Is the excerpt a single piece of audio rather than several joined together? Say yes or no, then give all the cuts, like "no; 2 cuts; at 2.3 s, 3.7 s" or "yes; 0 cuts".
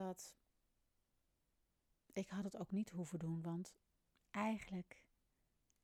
yes; 0 cuts